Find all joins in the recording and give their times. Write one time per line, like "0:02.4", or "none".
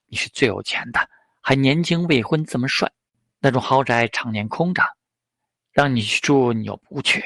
none